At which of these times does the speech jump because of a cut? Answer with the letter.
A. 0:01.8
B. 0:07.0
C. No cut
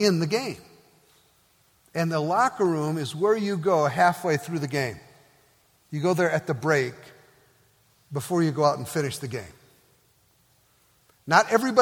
A